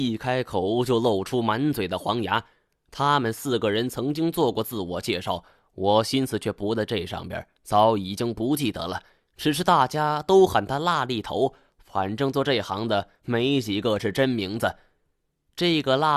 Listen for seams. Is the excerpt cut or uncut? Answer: uncut